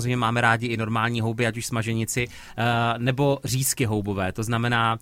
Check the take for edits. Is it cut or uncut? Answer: uncut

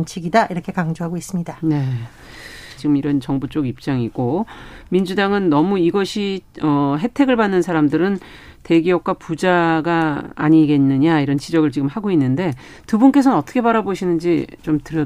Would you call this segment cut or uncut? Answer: cut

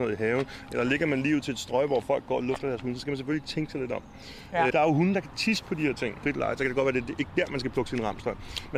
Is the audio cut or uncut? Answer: cut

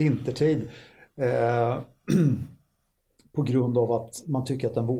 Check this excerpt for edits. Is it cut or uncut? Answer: uncut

